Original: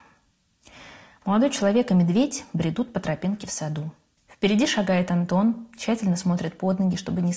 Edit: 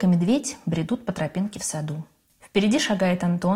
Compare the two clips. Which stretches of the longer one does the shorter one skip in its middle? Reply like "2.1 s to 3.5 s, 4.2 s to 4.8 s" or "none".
none